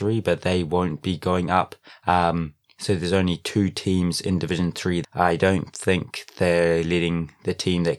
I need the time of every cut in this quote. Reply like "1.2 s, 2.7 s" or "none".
5.0 s